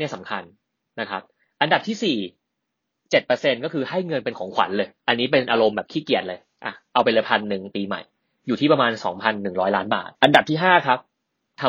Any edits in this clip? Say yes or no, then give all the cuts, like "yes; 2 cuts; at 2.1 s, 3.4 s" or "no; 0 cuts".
yes; 2 cuts; at 5.0 s, 10.2 s